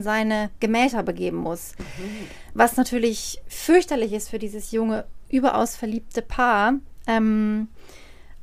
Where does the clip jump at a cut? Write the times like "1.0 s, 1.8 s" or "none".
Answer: none